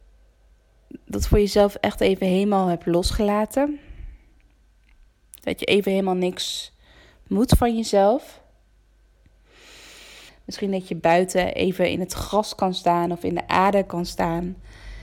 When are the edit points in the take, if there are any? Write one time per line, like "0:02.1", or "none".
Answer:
0:10.3